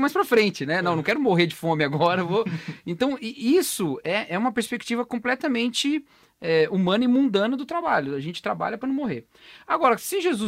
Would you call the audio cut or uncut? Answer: uncut